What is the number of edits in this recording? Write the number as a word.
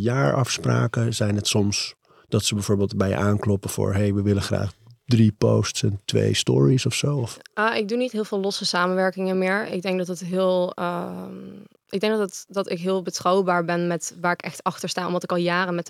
zero